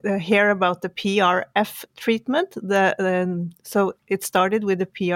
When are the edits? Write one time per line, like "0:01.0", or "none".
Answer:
none